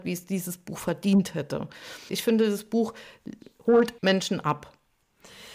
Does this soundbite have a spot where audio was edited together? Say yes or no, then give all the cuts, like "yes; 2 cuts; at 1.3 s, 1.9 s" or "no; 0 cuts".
yes; 2 cuts; at 2.1 s, 4.0 s